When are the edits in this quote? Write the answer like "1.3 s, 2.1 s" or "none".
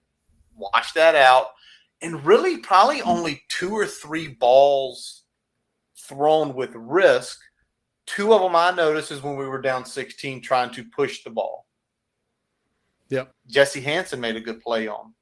13.3 s